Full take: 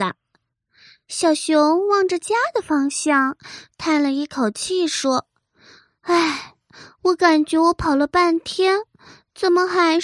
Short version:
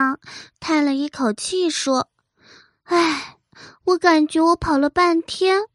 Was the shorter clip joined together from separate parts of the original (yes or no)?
no